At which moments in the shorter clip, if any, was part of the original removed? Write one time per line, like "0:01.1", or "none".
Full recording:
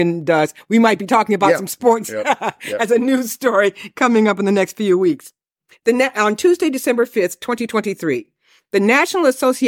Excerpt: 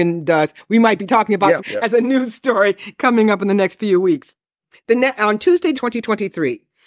0:01.6
0:05.7